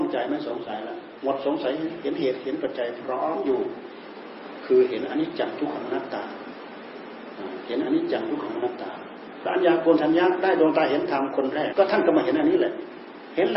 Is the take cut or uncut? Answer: cut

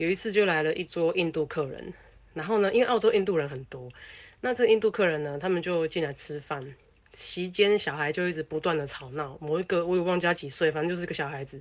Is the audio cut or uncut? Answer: uncut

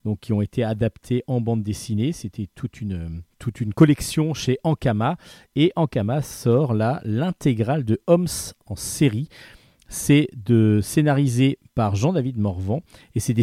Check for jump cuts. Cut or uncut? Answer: cut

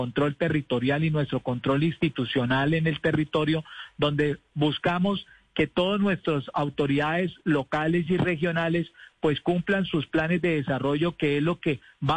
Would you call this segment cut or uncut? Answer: uncut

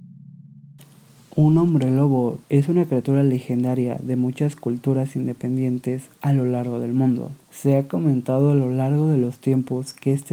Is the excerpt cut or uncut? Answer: cut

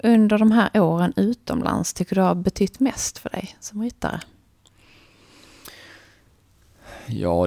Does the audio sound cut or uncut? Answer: uncut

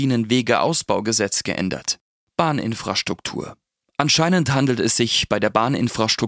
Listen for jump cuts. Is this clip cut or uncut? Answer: cut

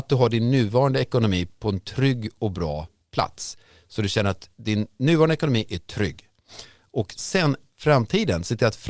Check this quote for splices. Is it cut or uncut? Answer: uncut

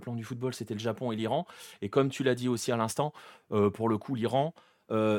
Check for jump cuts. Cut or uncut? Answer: uncut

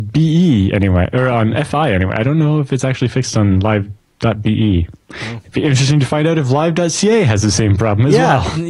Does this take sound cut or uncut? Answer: uncut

